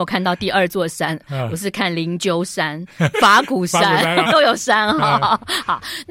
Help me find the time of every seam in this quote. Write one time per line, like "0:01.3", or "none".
0:03.1
0:04.2